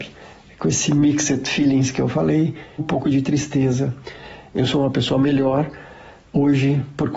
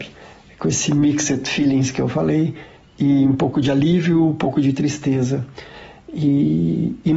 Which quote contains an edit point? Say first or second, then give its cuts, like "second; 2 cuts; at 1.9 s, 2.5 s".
first; 2 cuts; at 2.8 s, 4.5 s